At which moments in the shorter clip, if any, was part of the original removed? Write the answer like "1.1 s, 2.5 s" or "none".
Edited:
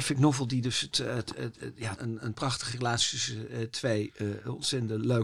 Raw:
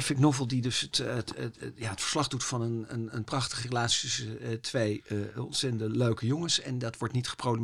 2.0 s